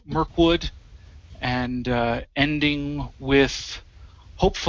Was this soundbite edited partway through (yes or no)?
no